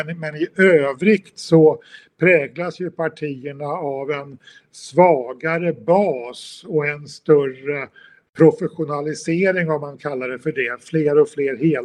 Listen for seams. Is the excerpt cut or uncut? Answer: uncut